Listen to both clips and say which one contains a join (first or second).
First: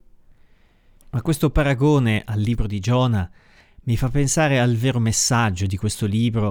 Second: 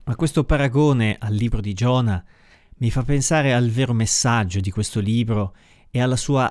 first